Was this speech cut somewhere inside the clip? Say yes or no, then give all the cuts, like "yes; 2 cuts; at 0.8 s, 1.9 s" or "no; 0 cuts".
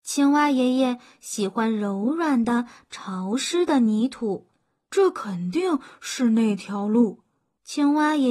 yes; 1 cut; at 4.9 s